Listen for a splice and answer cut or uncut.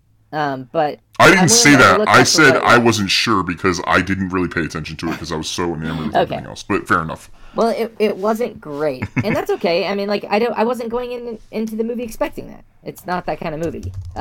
uncut